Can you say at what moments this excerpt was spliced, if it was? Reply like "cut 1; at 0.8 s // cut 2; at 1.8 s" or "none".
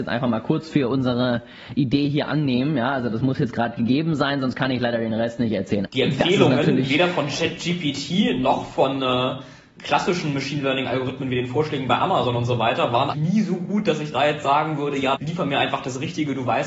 cut 1; at 5.8 s // cut 2; at 13.1 s // cut 3; at 15.1 s